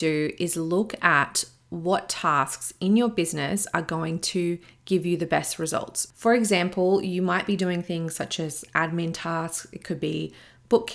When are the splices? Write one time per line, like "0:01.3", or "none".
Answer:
0:06.1